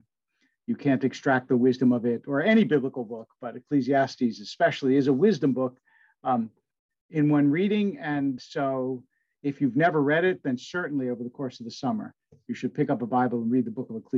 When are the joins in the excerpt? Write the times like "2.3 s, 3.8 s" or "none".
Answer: 8.4 s